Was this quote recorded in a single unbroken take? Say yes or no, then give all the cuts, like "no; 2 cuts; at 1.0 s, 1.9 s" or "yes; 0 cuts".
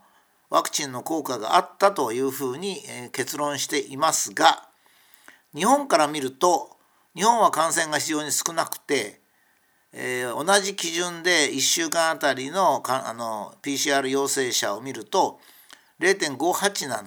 yes; 0 cuts